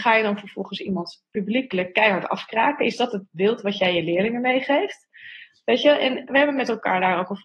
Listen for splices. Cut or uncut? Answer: cut